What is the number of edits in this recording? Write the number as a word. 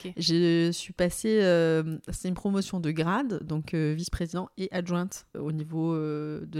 one